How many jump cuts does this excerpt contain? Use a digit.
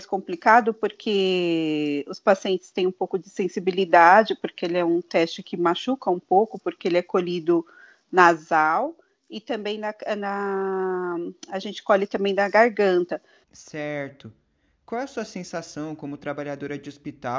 1